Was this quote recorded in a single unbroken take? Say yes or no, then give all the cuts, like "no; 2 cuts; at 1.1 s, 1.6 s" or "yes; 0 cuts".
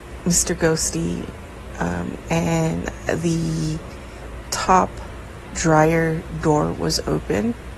no; 1 cut; at 2.2 s